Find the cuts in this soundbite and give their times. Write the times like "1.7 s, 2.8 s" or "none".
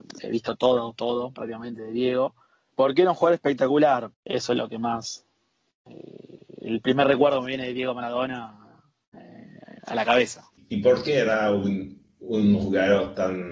2.7 s, 4.1 s